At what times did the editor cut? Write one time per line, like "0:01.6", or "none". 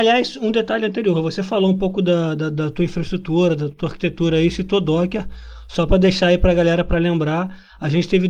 none